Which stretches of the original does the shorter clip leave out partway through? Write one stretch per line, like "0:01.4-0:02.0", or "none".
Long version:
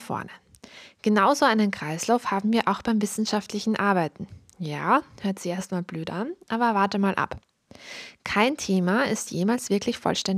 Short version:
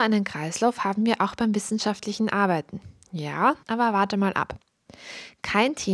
0:05.1-0:06.4